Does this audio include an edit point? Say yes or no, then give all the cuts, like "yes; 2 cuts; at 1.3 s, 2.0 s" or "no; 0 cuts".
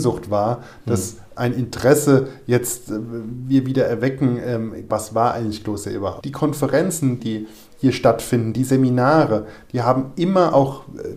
yes; 2 cuts; at 4.9 s, 6.2 s